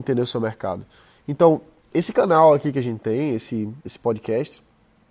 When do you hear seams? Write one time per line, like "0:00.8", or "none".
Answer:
0:01.2
0:03.8